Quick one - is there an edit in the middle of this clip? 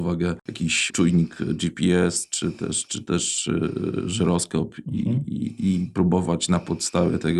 no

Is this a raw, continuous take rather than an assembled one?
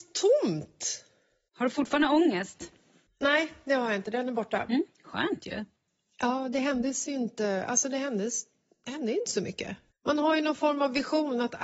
yes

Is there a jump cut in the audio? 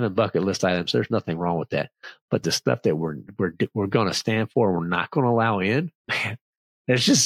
no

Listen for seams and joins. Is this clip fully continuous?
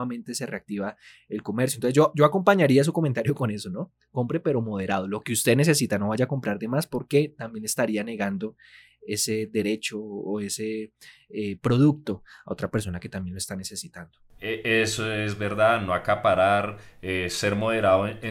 yes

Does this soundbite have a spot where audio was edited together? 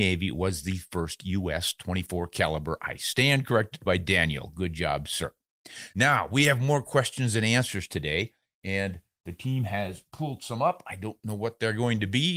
no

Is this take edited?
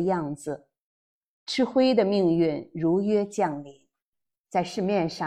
yes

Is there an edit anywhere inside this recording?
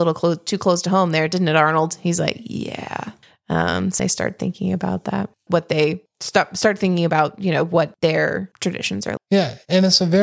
yes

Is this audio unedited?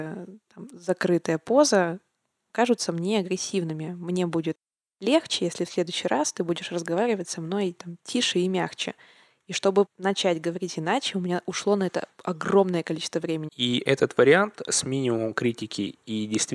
no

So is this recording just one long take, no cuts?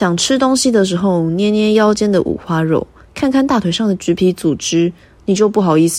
yes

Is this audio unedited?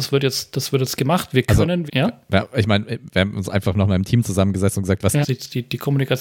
no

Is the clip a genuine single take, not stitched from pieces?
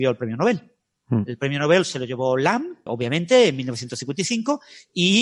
no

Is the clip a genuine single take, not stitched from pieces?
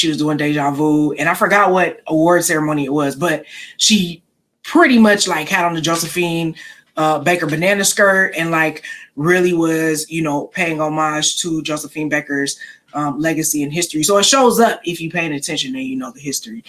yes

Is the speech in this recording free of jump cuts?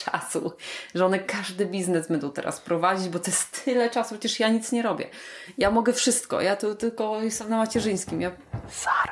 yes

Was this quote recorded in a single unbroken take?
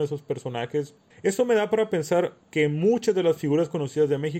no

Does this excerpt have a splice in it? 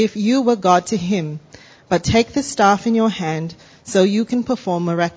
no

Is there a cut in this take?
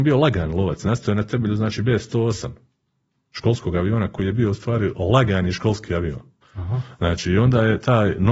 yes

